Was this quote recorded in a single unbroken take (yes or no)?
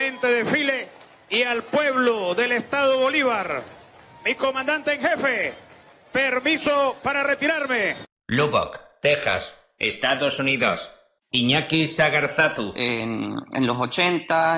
no